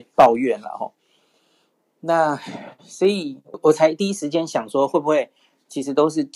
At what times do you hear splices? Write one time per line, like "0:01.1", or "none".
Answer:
0:03.5